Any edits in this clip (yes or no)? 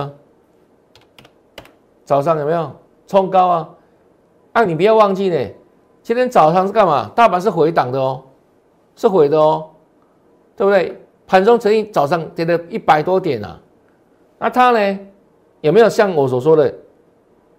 no